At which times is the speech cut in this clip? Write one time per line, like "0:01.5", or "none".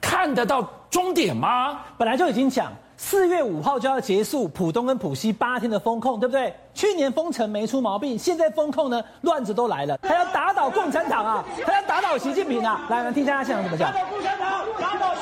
0:10.0

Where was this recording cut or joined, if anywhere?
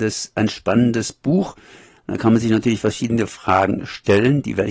none

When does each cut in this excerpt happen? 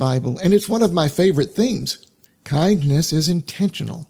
0:02.2

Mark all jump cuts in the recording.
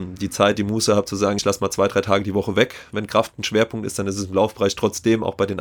none

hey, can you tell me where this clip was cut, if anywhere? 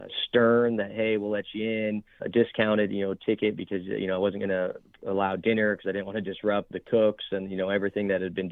0:02.2
0:06.7

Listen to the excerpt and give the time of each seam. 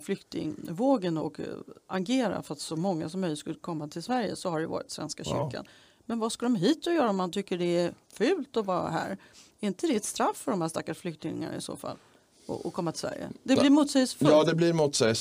0:01.2

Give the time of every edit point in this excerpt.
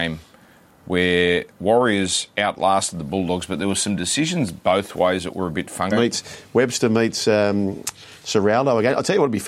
0:05.9

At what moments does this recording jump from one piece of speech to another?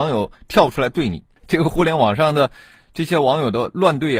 0:01.4

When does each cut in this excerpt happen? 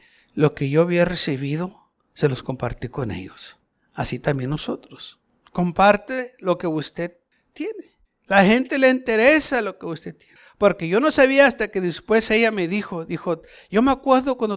none

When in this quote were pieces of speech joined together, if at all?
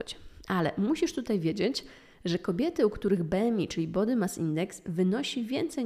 none

